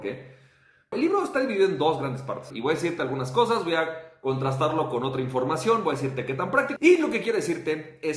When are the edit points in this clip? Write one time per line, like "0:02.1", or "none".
0:00.9
0:02.5
0:06.8